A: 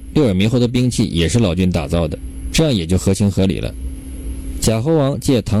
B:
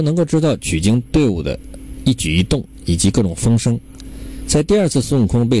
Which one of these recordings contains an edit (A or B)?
A